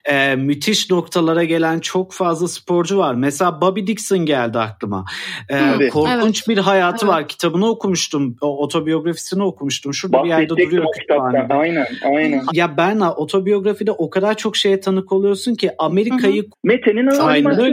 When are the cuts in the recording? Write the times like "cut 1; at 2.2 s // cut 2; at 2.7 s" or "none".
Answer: cut 1; at 12.5 s // cut 2; at 16.5 s